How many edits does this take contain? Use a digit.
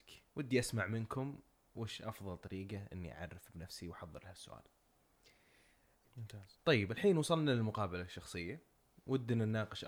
1